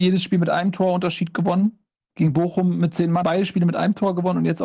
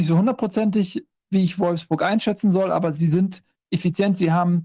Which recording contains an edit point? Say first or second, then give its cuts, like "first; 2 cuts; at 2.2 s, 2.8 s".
first; 2 cuts; at 2.0 s, 3.2 s